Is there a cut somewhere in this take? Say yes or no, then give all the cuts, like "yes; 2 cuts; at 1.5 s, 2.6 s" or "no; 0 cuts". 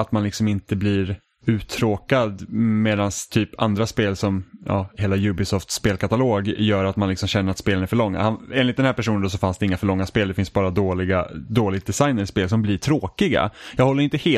no; 0 cuts